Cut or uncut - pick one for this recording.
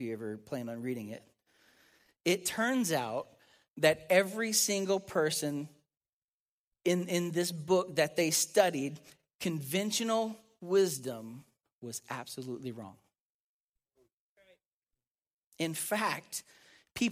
uncut